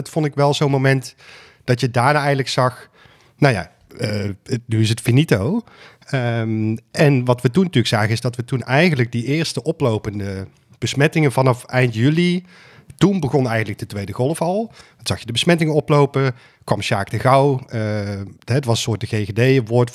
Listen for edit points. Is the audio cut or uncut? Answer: uncut